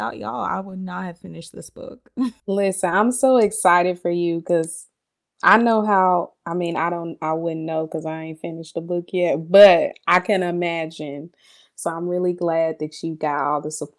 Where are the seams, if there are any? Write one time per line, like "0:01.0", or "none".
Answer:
0:02.4